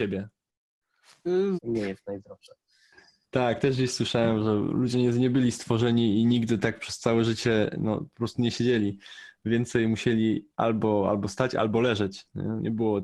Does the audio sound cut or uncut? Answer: cut